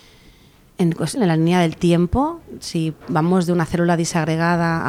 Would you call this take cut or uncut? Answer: cut